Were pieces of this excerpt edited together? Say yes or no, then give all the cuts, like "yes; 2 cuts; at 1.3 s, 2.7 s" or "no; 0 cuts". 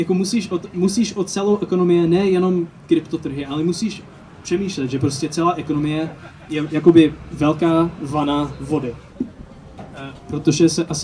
yes; 1 cut; at 9.1 s